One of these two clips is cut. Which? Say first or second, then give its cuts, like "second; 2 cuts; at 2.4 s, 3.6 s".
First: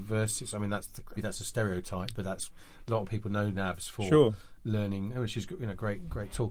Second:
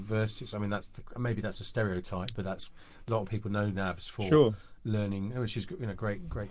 first; 1 cut; at 1.2 s